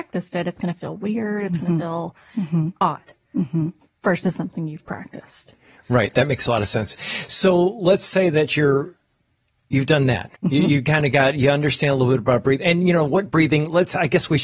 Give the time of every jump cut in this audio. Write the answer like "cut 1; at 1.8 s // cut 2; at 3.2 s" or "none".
cut 1; at 10.4 s